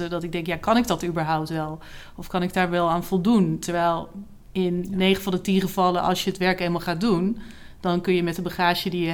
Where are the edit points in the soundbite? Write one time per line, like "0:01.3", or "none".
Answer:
none